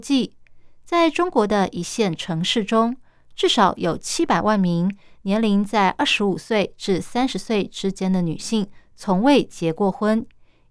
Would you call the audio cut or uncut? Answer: uncut